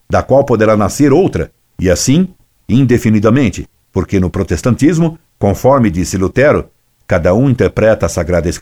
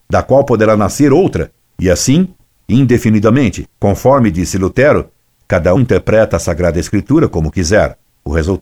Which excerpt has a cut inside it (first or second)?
second